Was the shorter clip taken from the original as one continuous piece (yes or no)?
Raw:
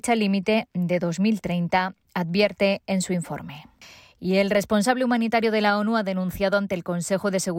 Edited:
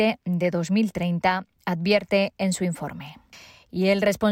yes